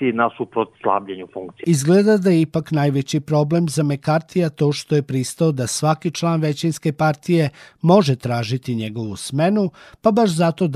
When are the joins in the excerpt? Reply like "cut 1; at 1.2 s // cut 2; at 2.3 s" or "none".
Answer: cut 1; at 1.6 s